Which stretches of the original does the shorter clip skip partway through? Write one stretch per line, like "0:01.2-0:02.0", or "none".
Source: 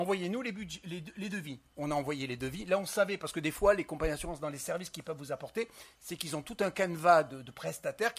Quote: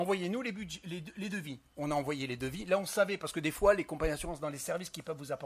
none